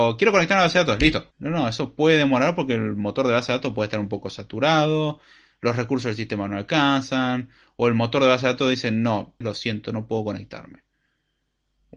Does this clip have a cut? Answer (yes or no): yes